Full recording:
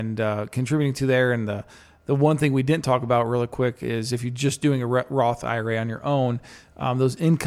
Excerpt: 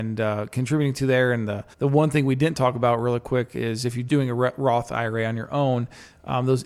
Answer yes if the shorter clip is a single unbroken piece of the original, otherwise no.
no